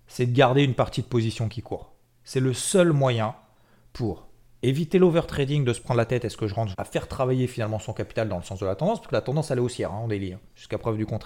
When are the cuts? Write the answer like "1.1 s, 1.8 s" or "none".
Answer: 6.7 s